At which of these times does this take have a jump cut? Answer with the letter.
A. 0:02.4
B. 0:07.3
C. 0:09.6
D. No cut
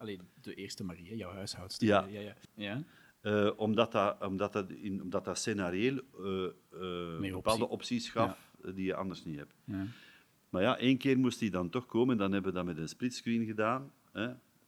A